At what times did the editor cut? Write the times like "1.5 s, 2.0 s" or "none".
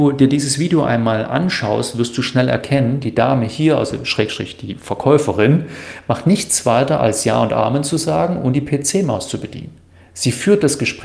none